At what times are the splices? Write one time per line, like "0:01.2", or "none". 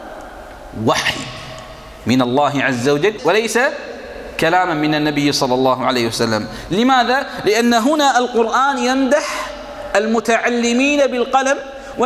0:03.2

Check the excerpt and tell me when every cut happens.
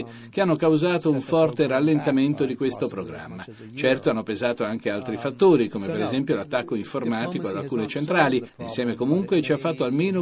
none

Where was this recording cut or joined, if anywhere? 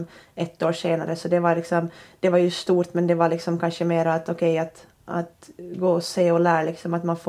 none

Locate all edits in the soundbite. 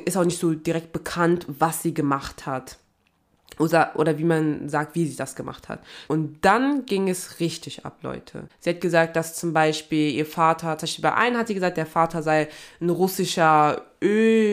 0:06.1
0:08.5

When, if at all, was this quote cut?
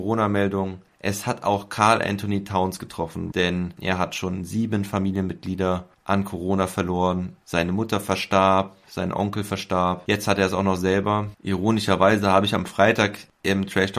0:03.3

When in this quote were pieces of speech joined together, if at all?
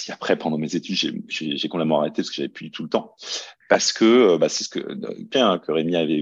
0:03.6
0:05.3

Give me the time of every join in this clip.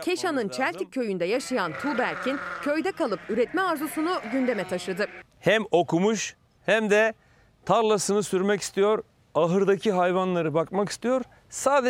none

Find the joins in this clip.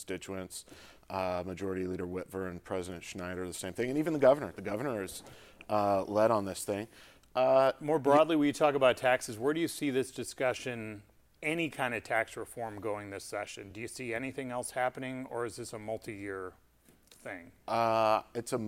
none

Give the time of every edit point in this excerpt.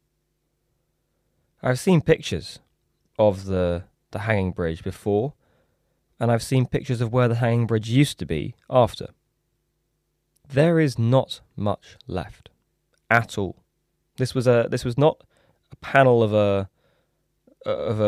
none

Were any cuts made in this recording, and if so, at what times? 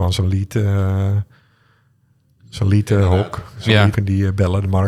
0:03.9

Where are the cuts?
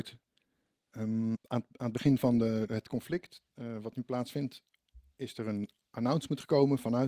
0:01.3
0:03.5

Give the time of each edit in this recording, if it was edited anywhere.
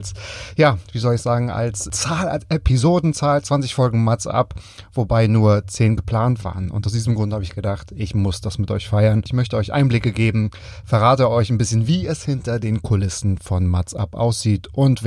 none

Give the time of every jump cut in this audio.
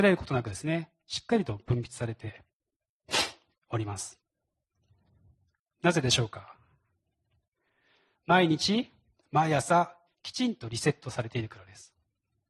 0:10.1

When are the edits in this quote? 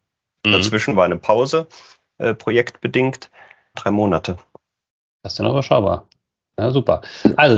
0:03.7

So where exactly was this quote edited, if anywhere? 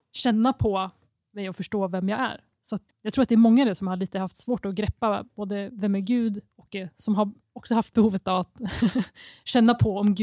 0:02.9

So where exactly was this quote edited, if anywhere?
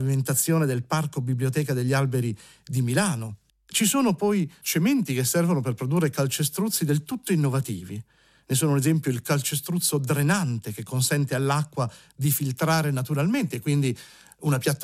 0:03.5

